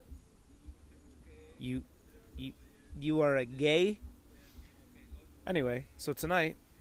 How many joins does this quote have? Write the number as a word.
zero